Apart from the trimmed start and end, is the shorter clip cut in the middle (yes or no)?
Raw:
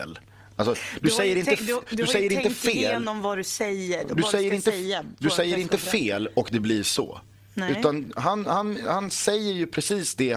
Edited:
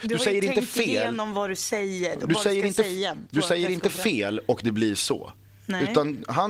no